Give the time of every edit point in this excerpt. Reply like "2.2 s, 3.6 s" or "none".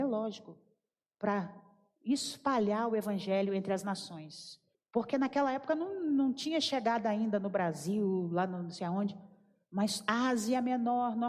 4.7 s